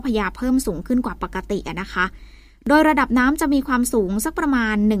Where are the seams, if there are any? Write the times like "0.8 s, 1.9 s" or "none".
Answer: none

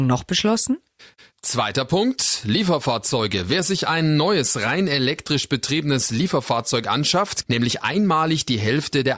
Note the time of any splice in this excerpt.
7.4 s

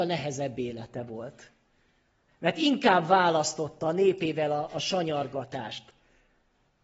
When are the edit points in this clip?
2.3 s

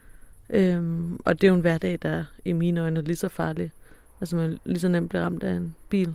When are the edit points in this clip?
none

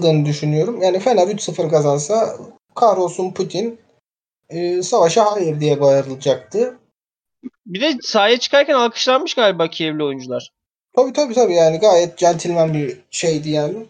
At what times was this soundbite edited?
7.6 s

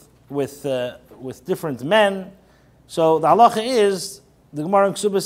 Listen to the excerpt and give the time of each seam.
none

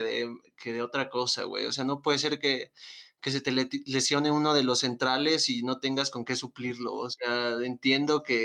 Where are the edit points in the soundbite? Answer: none

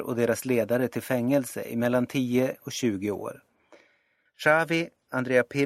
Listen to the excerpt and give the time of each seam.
4.3 s

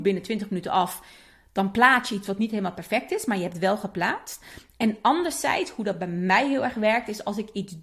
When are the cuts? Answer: none

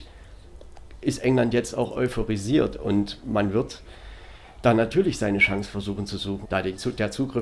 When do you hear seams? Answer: 6.4 s

